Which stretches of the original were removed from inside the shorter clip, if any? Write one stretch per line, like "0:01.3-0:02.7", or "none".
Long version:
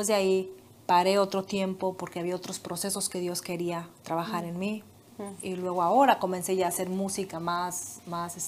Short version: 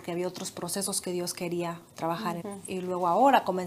0:04.5-0:05.2